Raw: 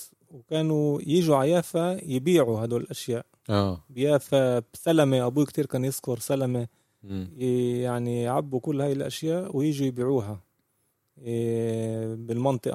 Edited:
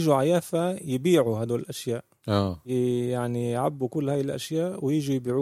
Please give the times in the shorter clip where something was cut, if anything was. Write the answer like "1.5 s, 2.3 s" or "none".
2.6 s